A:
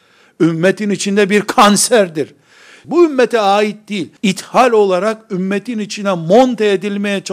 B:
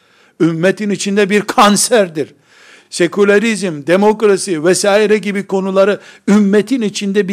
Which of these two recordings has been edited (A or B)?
A